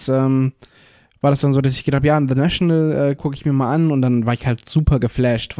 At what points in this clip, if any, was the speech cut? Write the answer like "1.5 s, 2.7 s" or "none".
3.2 s

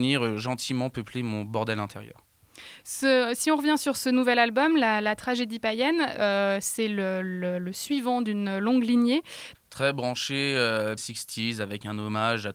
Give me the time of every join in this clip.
9.5 s, 11.0 s

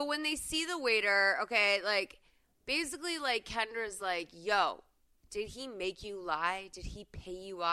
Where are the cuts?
none

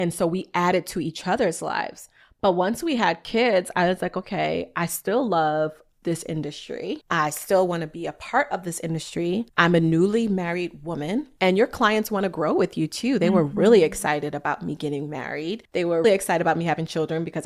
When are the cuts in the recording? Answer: 16.0 s

